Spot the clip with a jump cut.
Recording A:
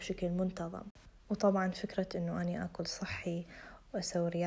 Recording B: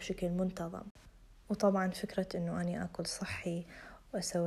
A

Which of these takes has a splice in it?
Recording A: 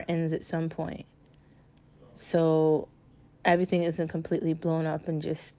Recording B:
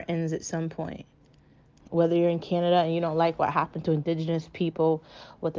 B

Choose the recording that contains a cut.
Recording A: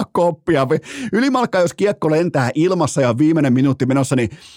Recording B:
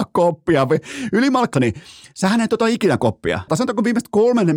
B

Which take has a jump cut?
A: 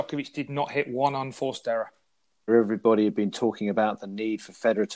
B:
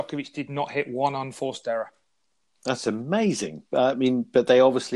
A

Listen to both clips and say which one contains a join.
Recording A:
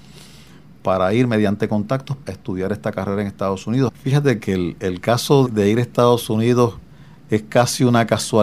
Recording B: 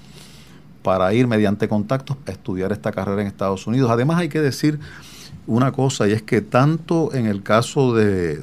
A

